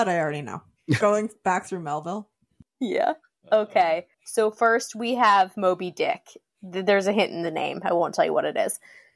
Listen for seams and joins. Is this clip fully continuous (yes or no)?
no